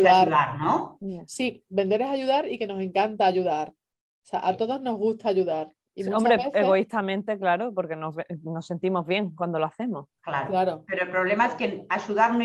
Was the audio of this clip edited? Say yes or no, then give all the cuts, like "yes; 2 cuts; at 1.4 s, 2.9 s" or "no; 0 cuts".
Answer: no; 0 cuts